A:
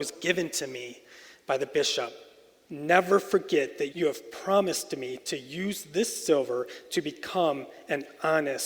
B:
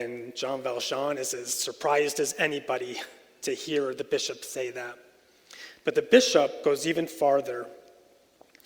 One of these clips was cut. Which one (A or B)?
A